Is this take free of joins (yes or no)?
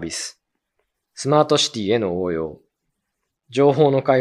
no